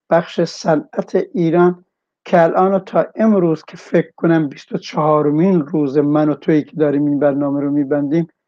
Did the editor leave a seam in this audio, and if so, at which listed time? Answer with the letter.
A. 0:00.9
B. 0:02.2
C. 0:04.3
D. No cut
D